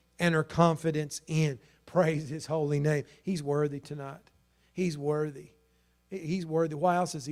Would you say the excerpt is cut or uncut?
uncut